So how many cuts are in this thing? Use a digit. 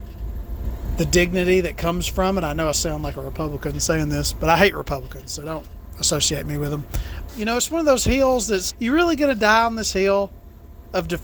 2